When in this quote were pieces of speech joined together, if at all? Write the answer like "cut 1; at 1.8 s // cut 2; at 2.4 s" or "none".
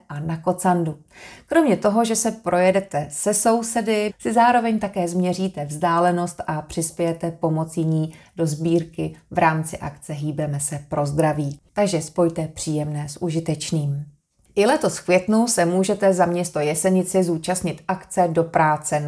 cut 1; at 4.1 s